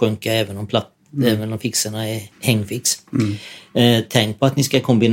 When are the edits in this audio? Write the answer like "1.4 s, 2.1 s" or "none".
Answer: 2.3 s